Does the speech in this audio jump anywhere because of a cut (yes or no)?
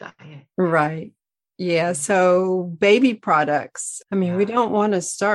yes